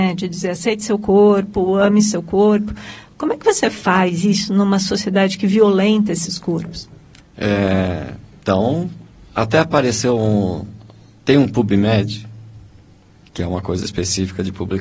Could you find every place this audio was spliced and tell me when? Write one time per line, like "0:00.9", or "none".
0:07.2